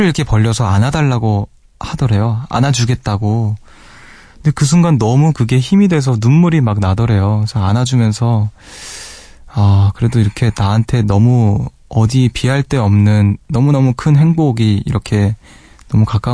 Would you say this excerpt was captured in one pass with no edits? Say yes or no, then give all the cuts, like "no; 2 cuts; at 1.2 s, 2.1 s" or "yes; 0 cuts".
yes; 0 cuts